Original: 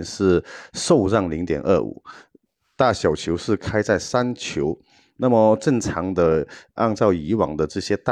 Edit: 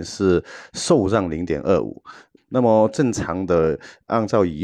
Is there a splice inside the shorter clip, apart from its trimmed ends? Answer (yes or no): yes